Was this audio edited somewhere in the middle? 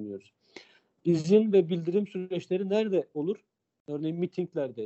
no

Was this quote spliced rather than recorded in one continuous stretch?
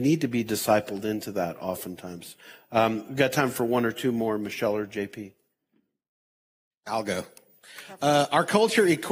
no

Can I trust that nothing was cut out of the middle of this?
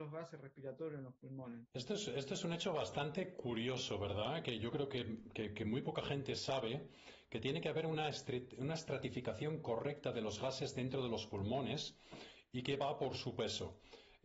no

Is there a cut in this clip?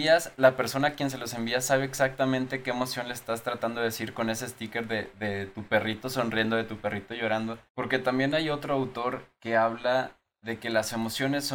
yes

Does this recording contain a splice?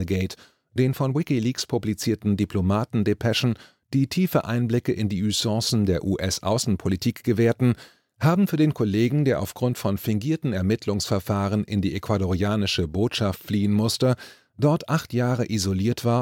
no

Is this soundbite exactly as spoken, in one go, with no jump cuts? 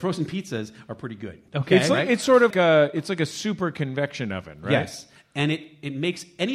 no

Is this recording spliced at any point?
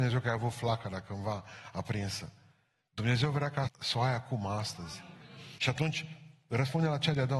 yes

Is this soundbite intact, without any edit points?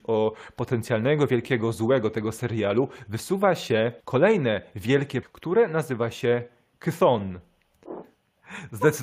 no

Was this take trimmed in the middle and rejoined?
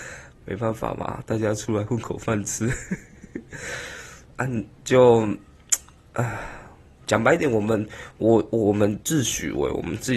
yes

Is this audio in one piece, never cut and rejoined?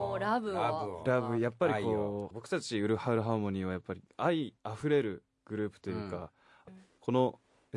no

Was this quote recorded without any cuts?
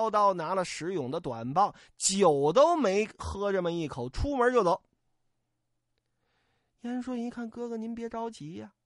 yes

